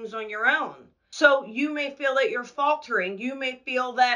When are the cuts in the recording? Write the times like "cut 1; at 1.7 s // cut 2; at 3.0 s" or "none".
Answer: cut 1; at 1.1 s